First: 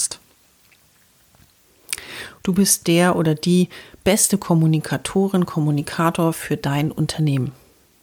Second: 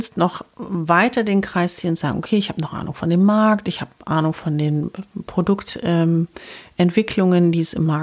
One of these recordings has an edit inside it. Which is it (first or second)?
first